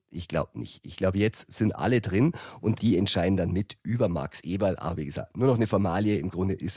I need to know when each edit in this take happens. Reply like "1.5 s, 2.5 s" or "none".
none